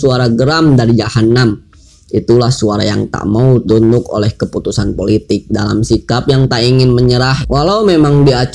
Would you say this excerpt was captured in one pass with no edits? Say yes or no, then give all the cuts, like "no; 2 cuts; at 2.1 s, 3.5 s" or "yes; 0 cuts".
no; 1 cut; at 7.4 s